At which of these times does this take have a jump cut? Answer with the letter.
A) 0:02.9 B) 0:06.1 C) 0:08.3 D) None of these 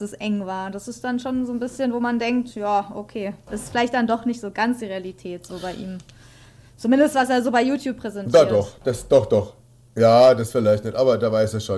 D